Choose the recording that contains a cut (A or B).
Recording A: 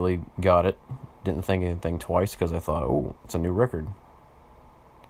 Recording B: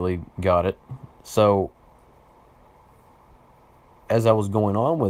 B